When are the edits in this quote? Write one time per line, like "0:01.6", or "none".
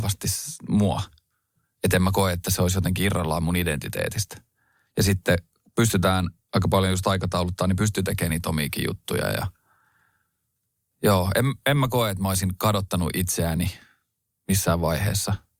none